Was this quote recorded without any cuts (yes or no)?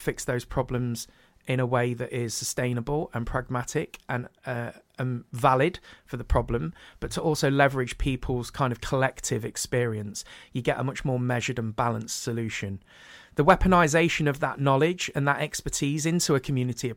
yes